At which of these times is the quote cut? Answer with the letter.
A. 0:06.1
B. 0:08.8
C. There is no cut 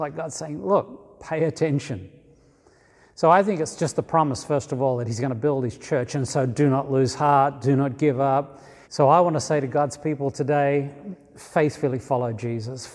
B